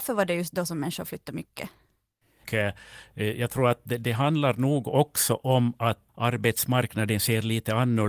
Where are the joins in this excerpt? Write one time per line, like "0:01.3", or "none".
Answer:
0:02.4
0:06.1